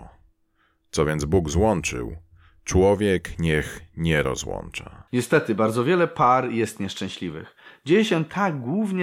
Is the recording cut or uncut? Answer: cut